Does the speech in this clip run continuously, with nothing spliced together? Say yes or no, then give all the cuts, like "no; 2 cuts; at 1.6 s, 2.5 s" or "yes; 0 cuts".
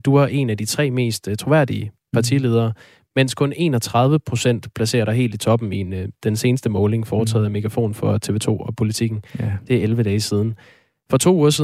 yes; 0 cuts